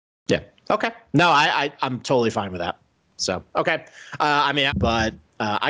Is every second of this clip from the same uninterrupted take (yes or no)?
no